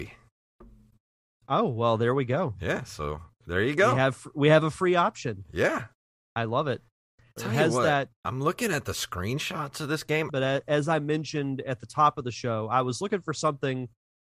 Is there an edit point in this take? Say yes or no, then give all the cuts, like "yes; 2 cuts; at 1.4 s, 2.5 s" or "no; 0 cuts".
yes; 2 cuts; at 7.4 s, 10.3 s